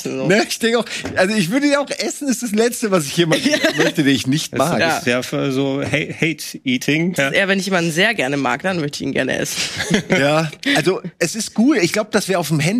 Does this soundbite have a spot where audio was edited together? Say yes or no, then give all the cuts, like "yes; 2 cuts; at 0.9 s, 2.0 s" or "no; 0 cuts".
yes; 1 cut; at 7.2 s